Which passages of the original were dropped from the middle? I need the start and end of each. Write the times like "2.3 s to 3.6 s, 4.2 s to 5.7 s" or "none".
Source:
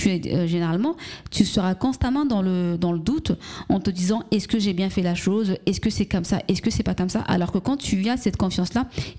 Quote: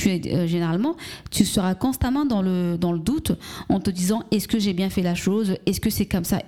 none